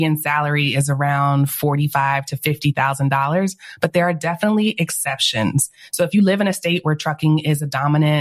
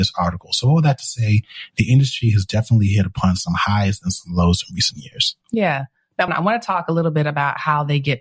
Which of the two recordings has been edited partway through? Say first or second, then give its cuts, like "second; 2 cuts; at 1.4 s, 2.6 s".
second; 1 cut; at 6.3 s